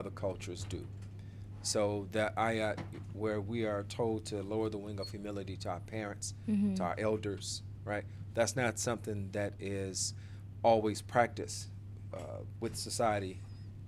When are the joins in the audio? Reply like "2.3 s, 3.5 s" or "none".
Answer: 12.1 s